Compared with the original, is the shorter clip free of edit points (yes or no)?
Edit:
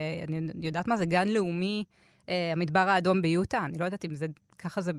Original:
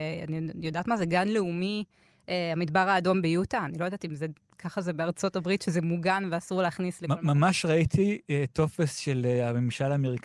yes